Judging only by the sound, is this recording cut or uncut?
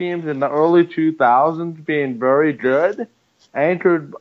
uncut